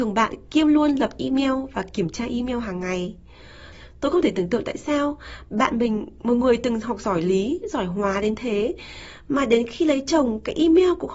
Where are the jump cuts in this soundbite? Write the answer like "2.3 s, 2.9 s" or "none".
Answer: none

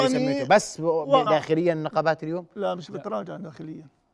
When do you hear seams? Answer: 1.3 s

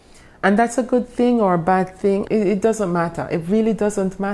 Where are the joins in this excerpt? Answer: 2.3 s

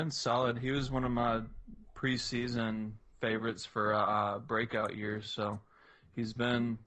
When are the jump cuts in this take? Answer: none

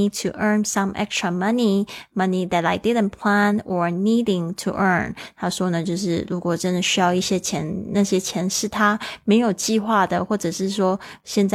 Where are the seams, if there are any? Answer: none

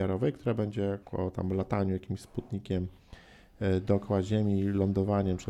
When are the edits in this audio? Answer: 1.0 s

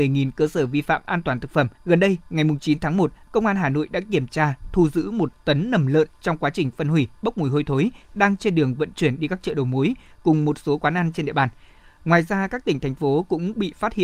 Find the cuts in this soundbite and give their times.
1.8 s

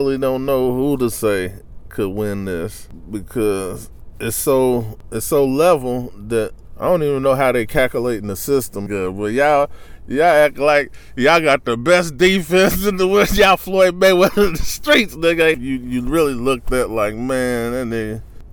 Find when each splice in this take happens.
8.9 s, 15.5 s

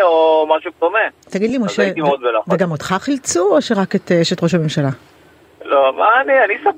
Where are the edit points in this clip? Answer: none

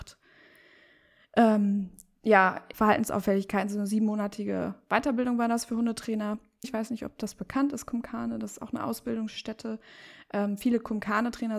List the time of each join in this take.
2.7 s, 6.6 s

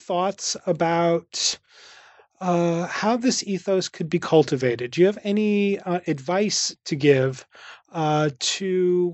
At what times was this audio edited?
none

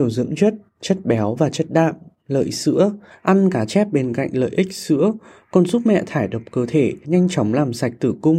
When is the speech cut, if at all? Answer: 3.1 s, 7.0 s

